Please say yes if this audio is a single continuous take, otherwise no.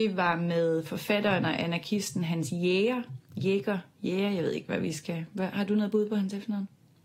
yes